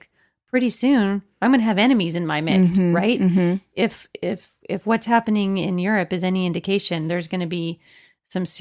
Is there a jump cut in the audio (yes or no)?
no